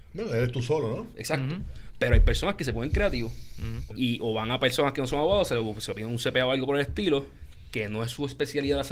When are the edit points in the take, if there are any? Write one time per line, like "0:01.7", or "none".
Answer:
0:03.9